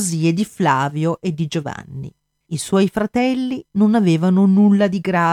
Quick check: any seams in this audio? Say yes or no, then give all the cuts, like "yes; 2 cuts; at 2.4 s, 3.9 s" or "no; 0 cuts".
yes; 1 cut; at 2.4 s